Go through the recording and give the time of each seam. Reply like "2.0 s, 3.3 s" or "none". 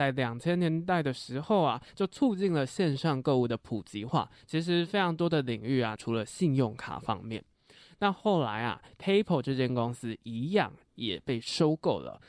6.0 s